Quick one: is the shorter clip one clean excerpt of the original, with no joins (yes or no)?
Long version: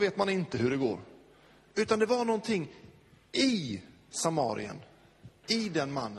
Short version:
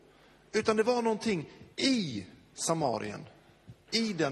no